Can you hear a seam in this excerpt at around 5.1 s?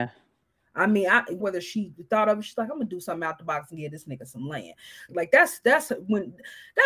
yes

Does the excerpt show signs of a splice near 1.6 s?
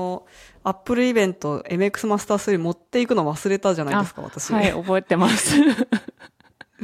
yes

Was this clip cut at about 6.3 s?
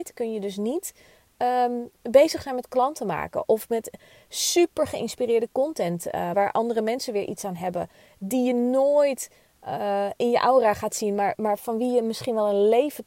yes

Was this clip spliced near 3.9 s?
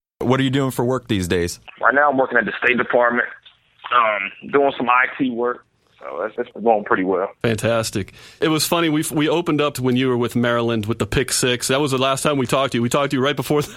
no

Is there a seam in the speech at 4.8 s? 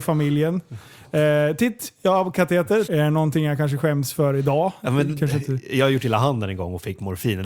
yes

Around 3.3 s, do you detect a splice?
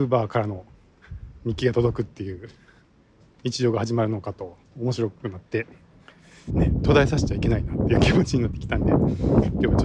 no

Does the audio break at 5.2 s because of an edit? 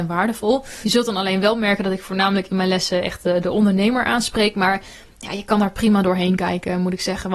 no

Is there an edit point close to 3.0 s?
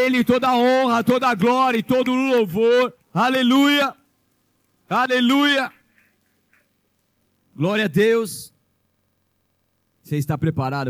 yes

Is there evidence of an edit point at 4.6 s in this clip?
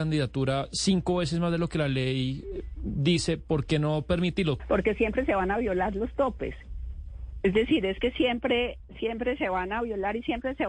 yes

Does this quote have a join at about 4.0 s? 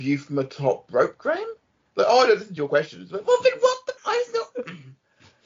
yes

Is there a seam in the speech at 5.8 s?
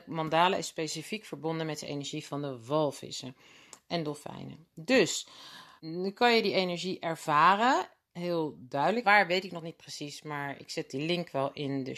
yes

